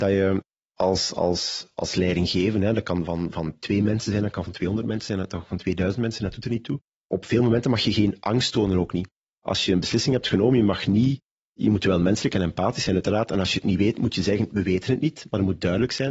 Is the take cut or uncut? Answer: uncut